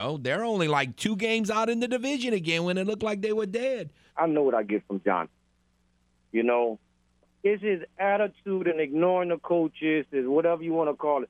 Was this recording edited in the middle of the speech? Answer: yes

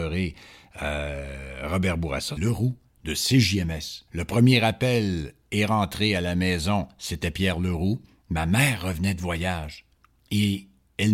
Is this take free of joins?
no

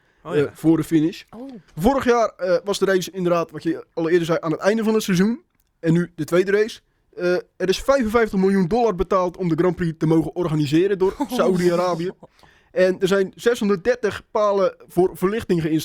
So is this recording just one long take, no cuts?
no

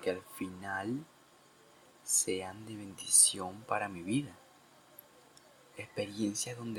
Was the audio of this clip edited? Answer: yes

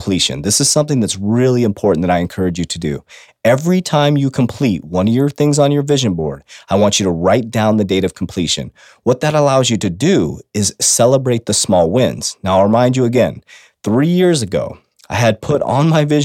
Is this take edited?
no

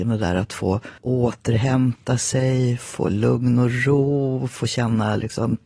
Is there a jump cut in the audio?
yes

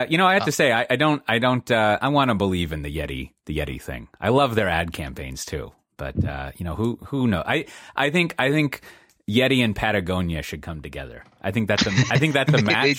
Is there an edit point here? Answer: no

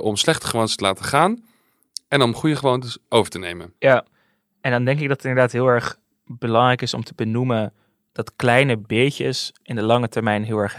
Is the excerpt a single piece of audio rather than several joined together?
no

